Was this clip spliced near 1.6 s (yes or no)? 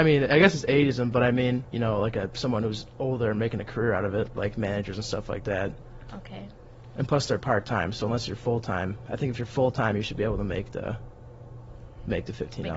yes